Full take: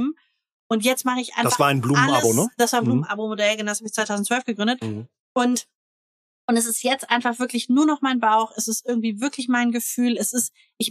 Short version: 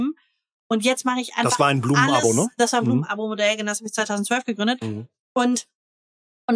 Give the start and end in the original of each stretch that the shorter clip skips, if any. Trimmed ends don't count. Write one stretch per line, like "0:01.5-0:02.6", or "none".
none